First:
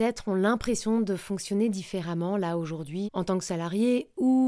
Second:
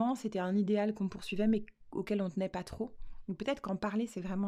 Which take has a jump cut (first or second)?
first